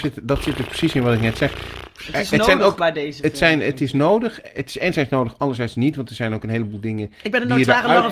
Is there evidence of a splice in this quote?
no; 0 cuts

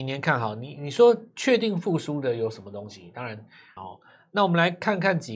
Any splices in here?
yes; 1 cut; at 3.8 s

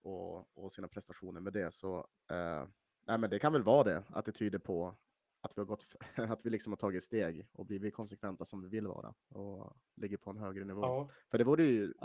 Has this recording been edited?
no; 0 cuts

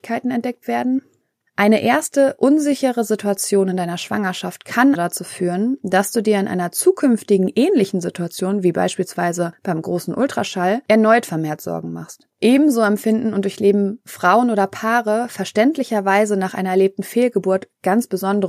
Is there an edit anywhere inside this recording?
yes; 2 cuts; at 5.0 s, 12.3 s

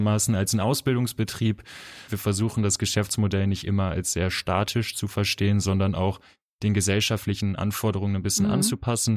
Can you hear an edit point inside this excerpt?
yes; 1 cut; at 2.1 s

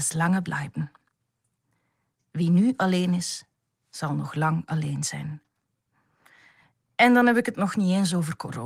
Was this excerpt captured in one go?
yes; 0 cuts

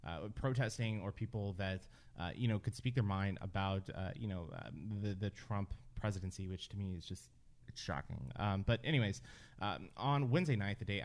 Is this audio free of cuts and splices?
yes; 0 cuts

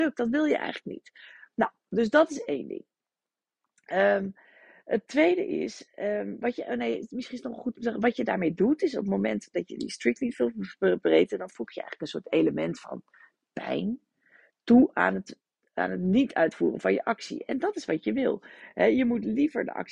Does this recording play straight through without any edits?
yes; 0 cuts

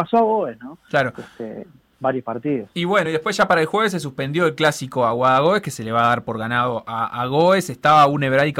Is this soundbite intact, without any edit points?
yes; 0 cuts

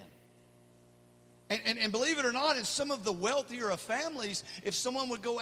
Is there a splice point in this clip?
no; 0 cuts

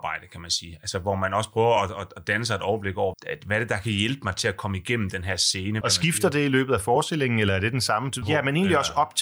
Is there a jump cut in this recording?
yes; 3 cuts; at 3.1 s, 5.8 s, 8.2 s

